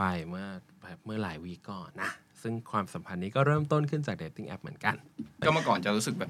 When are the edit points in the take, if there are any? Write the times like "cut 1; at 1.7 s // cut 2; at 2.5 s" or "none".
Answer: cut 1; at 1.9 s